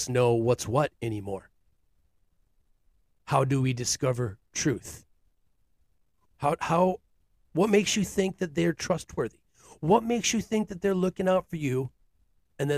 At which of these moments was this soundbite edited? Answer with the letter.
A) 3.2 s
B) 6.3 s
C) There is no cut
B